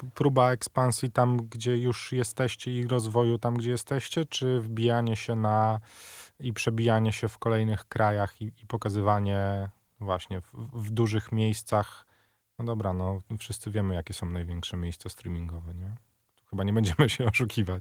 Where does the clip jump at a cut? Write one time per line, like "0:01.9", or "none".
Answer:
none